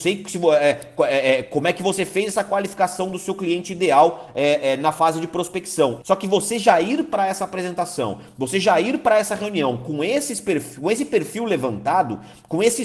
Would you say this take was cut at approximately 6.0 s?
yes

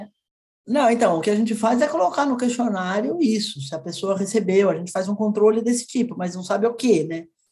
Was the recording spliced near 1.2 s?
no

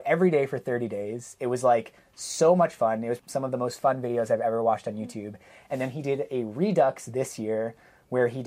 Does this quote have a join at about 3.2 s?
yes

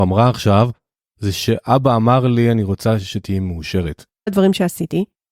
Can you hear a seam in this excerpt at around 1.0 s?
no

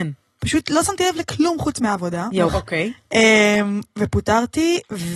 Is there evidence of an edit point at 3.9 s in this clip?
no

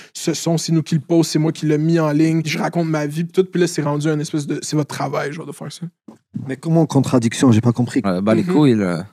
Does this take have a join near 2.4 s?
yes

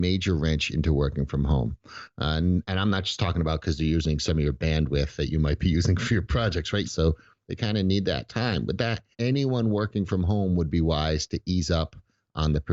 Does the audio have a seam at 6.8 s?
yes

